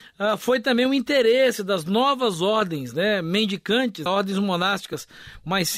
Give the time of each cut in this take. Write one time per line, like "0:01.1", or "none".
0:04.1